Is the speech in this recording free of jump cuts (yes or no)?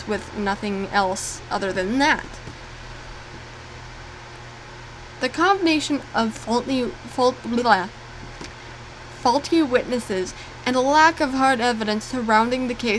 yes